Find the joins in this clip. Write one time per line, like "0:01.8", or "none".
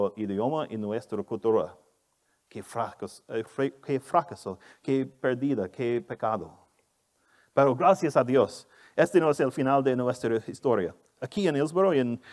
none